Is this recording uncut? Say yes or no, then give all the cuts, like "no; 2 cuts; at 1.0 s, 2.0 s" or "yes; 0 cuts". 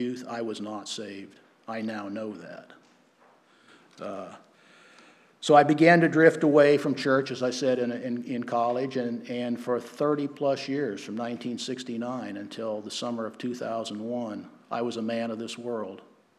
yes; 0 cuts